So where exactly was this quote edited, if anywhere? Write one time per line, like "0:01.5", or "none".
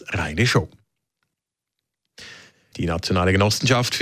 0:02.7